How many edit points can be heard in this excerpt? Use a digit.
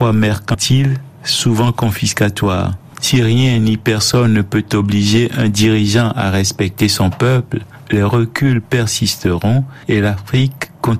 2